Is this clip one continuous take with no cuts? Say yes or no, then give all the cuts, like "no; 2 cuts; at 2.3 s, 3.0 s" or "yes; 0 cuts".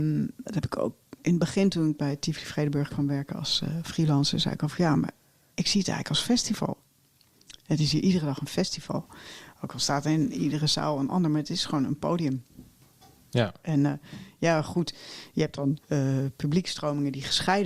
no; 1 cut; at 15.8 s